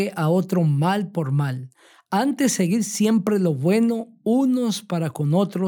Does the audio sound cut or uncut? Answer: uncut